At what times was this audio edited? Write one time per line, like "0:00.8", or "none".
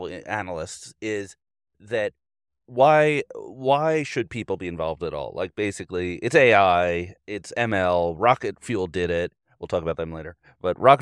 none